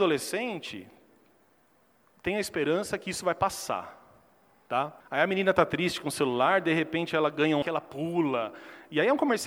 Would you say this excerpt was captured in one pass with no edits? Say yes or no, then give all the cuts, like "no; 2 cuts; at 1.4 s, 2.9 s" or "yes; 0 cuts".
no; 2 cuts; at 5.0 s, 7.6 s